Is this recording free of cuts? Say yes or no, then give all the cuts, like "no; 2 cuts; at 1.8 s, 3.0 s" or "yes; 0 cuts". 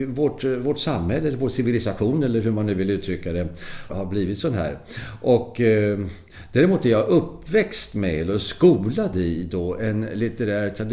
no; 1 cut; at 3.9 s